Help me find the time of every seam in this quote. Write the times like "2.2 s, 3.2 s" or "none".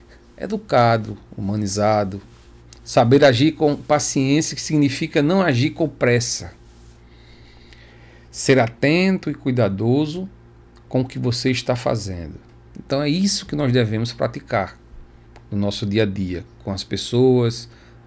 12.7 s